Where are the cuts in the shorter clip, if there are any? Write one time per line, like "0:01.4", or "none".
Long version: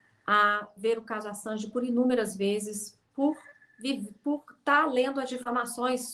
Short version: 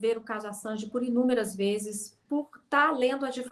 0:02.2